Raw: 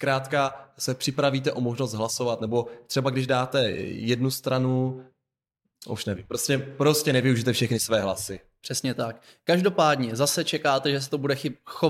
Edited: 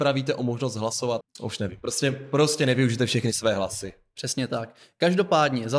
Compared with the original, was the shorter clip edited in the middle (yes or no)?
yes